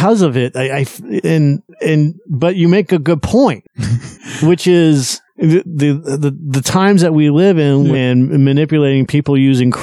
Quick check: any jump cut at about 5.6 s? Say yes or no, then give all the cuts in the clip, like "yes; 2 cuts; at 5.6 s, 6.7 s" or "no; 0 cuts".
yes; 2 cuts; at 5.6 s, 7.9 s